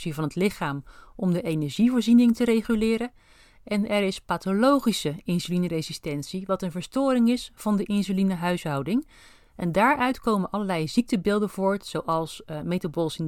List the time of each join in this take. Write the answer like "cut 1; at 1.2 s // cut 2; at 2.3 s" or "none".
none